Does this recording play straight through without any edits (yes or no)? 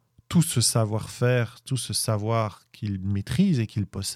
yes